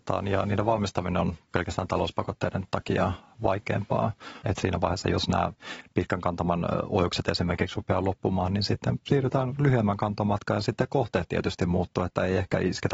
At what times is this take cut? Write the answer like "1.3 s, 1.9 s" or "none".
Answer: 4.4 s